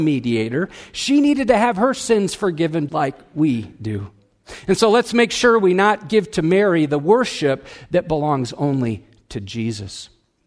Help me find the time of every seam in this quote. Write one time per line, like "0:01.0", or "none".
0:02.9